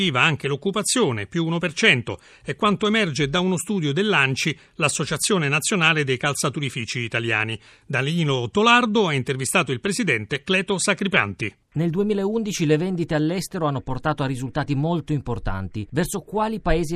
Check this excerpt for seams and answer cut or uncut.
cut